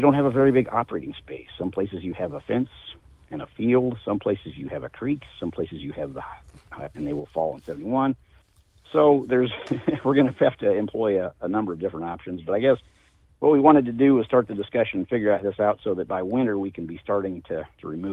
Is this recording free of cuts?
no; 1 cut; at 6.9 s

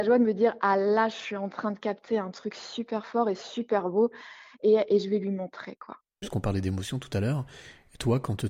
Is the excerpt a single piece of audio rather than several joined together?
no; 1 cut; at 6.2 s

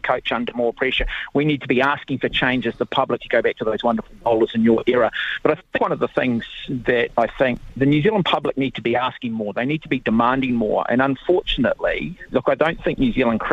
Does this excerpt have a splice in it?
yes; 2 cuts; at 3.2 s, 12.3 s

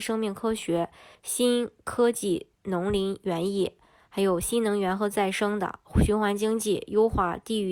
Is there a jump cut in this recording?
yes; 1 cut; at 1.1 s

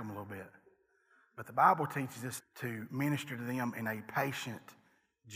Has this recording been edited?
yes; 1 cut; at 2.4 s

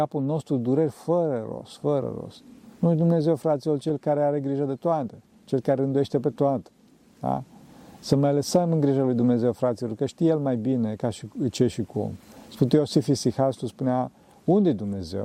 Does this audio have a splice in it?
no; 0 cuts

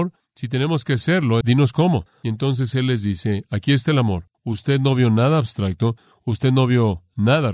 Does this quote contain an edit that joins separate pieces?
yes; 2 cuts; at 1.4 s, 4.3 s

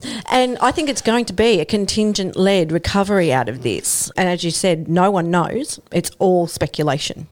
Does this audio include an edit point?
no; 0 cuts

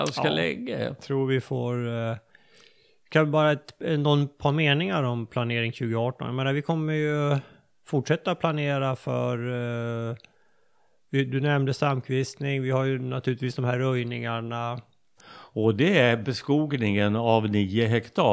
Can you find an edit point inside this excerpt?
yes; 1 cut; at 15.2 s

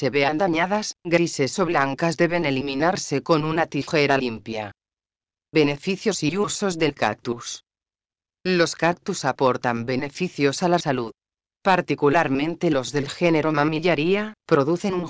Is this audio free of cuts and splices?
yes; 0 cuts

